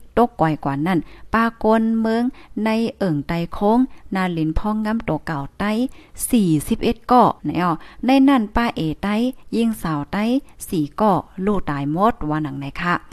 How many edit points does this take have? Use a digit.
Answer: 1